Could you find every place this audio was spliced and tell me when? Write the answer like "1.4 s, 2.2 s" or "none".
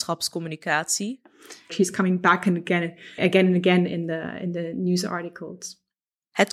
1.7 s, 3.2 s